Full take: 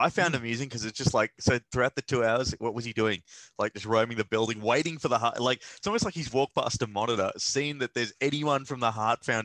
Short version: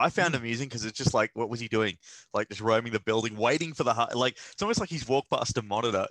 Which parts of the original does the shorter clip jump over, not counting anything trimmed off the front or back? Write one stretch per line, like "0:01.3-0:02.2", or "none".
0:01.3-0:02.6

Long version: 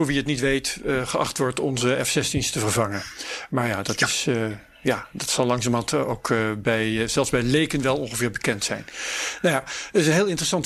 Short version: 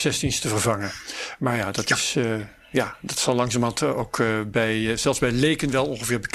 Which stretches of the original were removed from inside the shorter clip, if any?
none

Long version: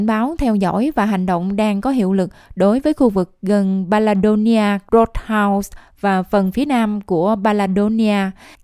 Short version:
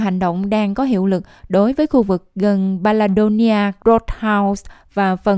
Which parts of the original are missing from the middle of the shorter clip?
none

